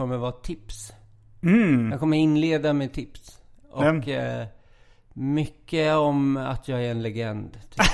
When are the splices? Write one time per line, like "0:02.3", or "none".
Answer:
none